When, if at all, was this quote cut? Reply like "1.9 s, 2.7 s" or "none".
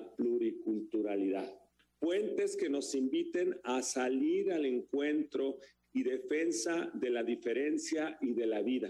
none